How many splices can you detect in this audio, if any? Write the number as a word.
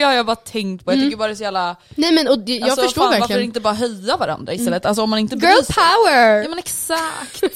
zero